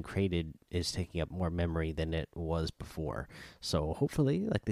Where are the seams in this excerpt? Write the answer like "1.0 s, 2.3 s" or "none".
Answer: none